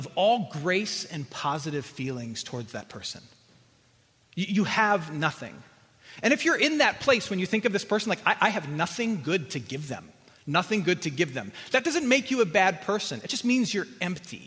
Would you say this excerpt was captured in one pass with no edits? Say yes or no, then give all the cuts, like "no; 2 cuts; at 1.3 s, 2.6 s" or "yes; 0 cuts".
yes; 0 cuts